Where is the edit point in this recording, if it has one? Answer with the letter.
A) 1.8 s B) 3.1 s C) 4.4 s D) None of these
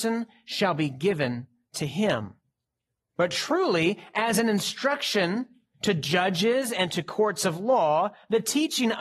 B